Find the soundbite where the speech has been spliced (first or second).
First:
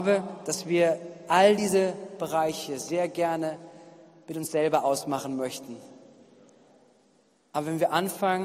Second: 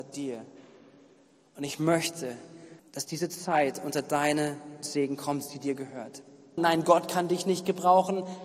second